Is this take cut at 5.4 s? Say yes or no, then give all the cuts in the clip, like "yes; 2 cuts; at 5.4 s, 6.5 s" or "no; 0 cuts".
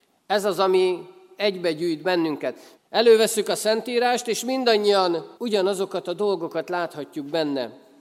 yes; 2 cuts; at 2.8 s, 5.4 s